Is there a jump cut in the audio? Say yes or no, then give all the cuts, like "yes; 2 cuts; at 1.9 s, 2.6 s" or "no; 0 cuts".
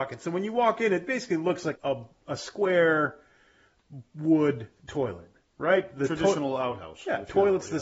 yes; 1 cut; at 1.7 s